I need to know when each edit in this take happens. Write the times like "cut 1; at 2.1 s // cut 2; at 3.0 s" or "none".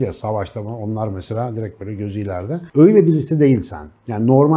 none